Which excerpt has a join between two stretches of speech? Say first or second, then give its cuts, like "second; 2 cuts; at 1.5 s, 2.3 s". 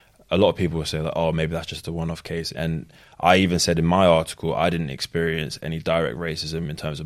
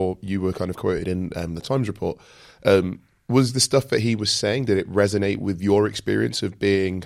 first; 1 cut; at 2.5 s